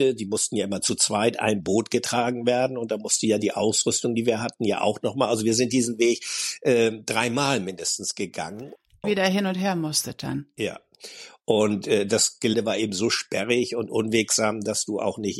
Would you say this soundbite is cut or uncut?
cut